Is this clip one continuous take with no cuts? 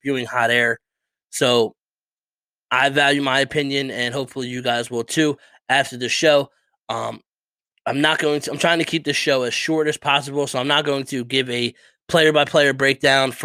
yes; 0 cuts

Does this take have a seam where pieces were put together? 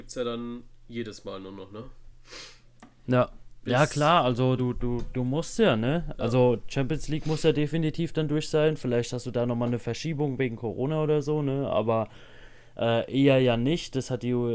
no; 0 cuts

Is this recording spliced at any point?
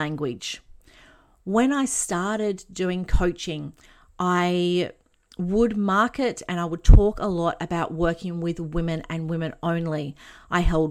no; 0 cuts

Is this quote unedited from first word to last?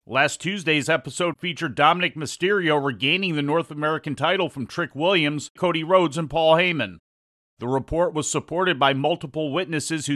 no; 2 cuts; at 5.6 s, 7.5 s

